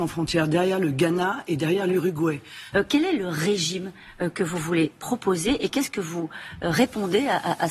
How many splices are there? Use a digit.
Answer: 1